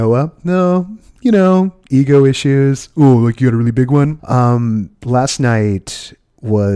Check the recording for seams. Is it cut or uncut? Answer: cut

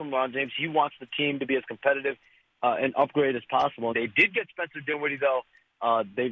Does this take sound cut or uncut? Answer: cut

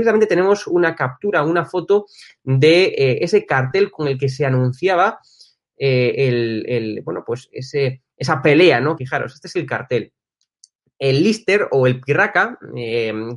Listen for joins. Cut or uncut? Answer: cut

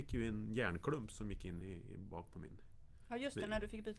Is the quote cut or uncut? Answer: uncut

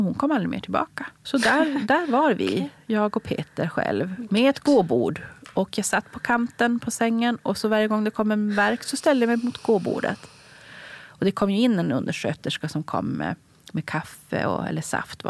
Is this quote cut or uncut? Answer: cut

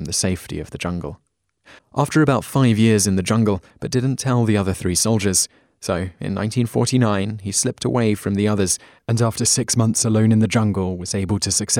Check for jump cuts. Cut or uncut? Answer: cut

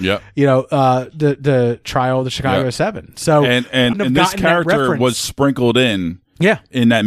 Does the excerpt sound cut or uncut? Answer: cut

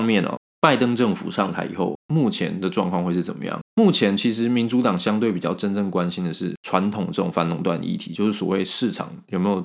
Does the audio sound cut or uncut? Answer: uncut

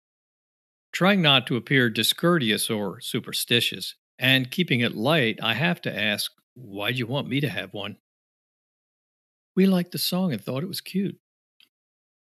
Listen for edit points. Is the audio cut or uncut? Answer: uncut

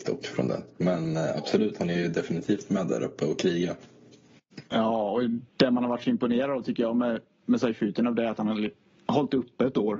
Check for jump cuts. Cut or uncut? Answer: uncut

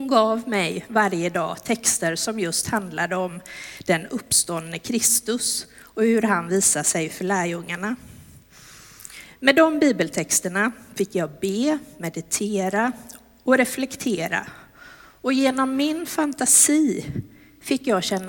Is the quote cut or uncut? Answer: uncut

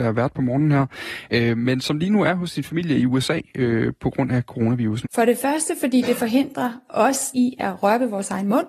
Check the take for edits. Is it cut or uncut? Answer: cut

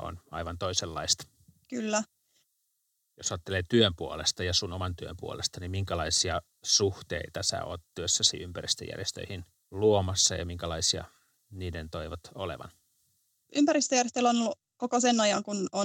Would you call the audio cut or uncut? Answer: uncut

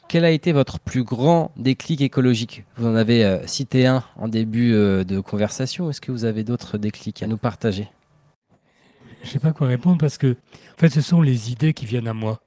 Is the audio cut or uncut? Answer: uncut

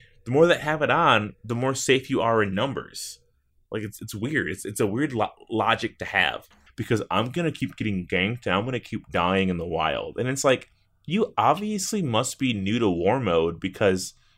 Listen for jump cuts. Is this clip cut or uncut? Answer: cut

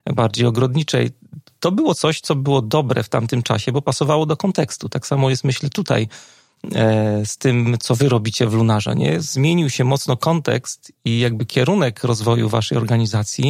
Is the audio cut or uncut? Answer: uncut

